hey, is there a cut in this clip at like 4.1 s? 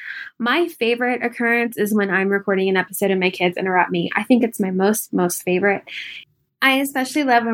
no; 0 cuts

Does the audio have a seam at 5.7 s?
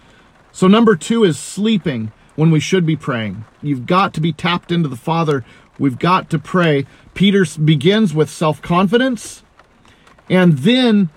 no; 1 cut; at 3.6 s

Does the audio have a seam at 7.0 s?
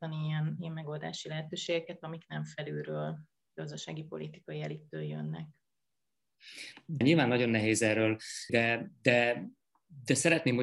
yes; 2 cuts; at 7.0 s, 8.5 s

